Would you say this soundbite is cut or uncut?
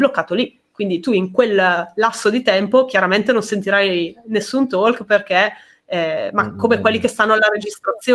uncut